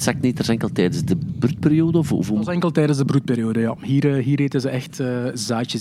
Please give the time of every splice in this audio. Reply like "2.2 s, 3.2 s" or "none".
none